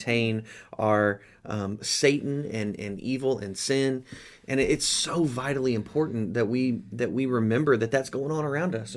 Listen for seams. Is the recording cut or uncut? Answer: cut